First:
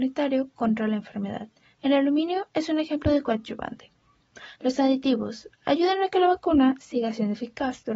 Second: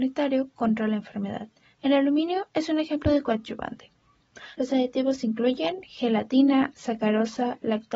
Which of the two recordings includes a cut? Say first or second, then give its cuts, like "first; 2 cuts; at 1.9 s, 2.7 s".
second; 2 cuts; at 4.5 s, 6.7 s